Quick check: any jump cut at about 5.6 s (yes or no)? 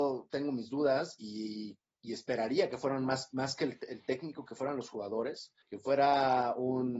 yes